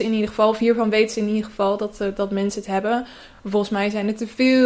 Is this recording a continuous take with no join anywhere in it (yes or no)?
yes